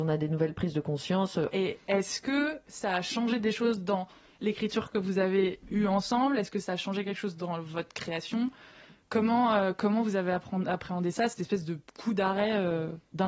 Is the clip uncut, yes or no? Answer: no